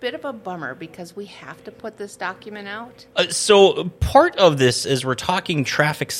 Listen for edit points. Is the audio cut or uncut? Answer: cut